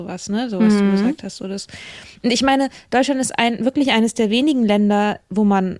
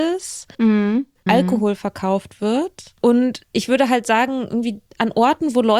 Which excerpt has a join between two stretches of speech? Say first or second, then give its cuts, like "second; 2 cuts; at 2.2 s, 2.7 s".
second; 1 cut; at 1.3 s